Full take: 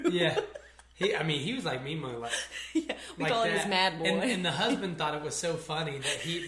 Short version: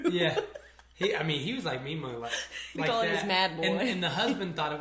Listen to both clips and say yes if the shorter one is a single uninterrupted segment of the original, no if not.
no